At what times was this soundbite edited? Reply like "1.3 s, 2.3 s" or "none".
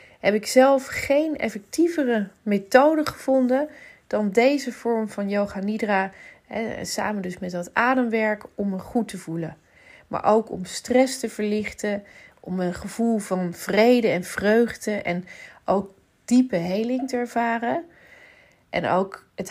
none